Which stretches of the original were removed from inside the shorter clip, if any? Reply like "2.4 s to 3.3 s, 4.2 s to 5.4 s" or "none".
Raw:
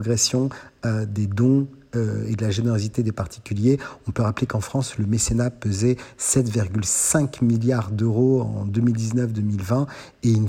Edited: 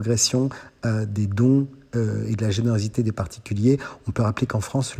none